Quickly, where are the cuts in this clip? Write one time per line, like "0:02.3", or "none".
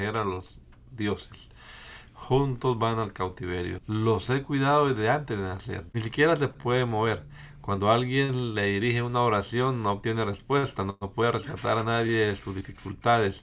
0:03.8
0:05.9

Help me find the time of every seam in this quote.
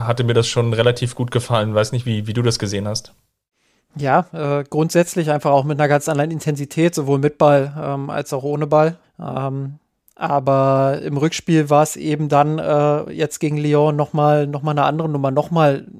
0:09.0

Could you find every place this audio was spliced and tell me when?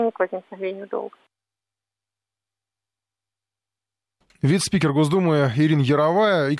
none

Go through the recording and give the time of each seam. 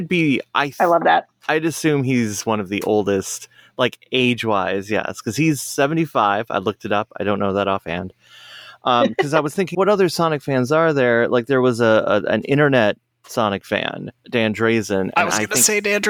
0:09.7
0:14.2

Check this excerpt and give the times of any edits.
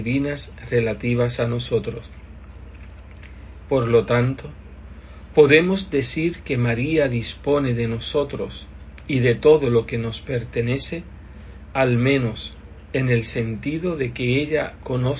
0:03.6

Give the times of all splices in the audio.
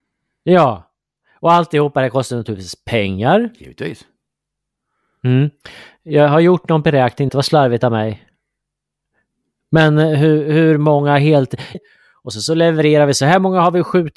0:07.3
0:11.7

